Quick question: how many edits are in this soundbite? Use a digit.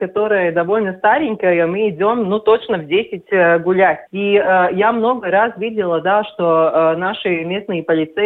1